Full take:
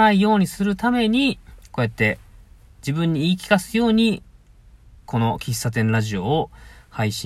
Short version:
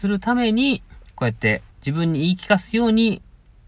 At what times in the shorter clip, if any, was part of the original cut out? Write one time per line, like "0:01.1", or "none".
0:01.7